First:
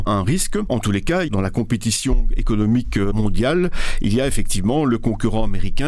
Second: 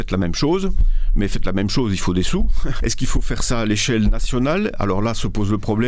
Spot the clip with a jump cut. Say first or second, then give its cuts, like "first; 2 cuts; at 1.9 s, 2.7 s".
second; 1 cut; at 2.8 s